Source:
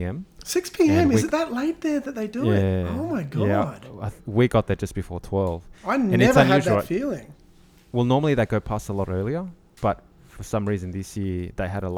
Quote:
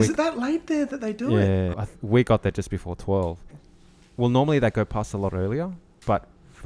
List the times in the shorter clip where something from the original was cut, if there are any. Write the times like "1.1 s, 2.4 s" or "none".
1.7 s, 3.5 s